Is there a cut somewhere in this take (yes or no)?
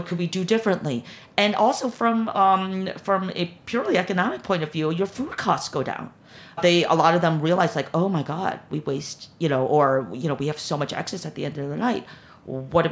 yes